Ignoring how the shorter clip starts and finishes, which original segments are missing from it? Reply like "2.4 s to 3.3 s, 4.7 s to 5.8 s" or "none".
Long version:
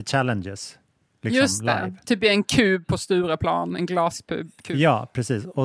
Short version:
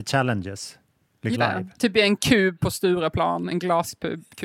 1.3 s to 1.6 s

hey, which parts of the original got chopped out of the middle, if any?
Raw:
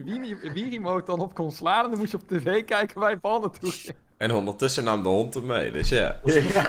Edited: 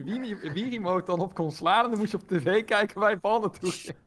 none

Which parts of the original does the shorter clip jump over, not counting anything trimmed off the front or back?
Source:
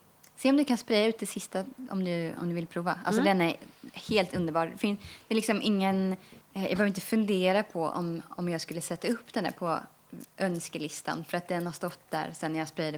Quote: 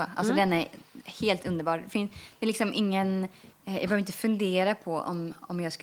none

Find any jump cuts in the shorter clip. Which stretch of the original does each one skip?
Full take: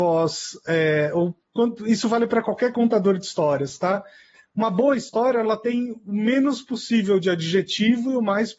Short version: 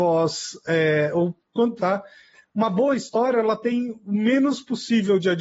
1.8 s to 3.8 s

